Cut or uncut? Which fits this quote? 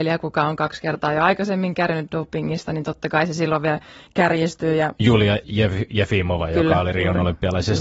uncut